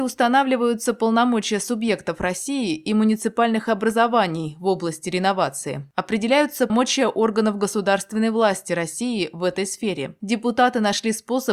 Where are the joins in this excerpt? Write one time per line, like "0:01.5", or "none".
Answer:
0:06.7